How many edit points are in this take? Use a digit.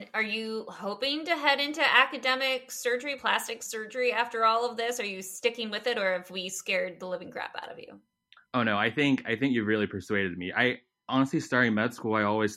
0